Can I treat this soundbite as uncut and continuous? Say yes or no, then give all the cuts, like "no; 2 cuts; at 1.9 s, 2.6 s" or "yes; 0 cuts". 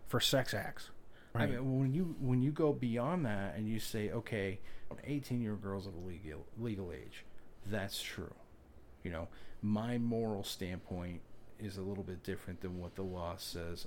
no; 2 cuts; at 1.4 s, 4.9 s